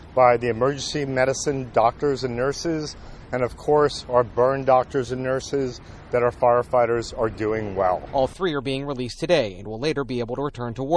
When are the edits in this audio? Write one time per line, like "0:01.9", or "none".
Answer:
0:03.3

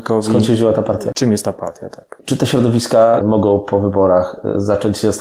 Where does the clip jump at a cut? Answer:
0:02.2
0:03.2

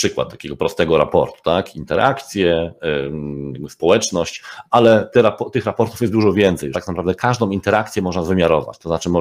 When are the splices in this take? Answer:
0:06.7

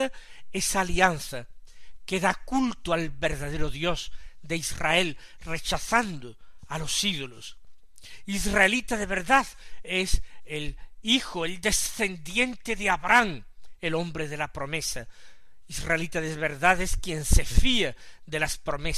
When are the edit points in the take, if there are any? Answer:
none

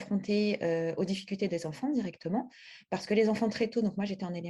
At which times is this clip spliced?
none

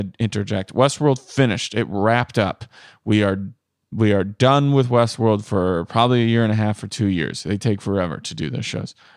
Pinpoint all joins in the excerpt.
none

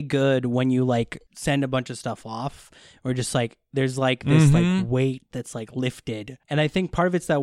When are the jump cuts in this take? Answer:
none

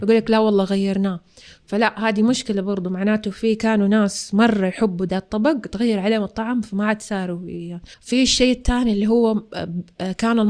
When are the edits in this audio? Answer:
0:07.9

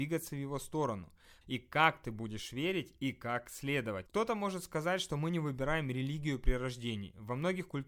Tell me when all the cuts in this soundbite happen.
0:01.4
0:04.1

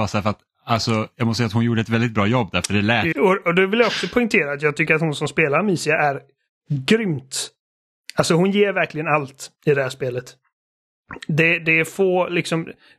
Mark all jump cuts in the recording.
0:03.1

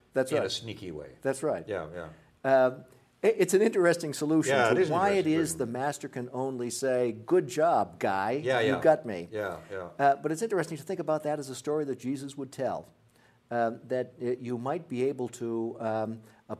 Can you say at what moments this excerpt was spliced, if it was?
none

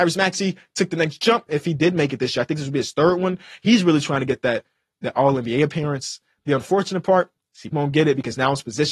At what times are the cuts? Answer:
0:01.5
0:07.7

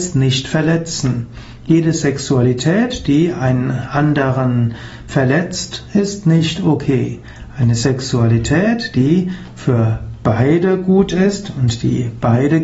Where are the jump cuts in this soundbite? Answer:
none

